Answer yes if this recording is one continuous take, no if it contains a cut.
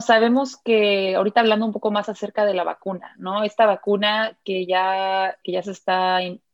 no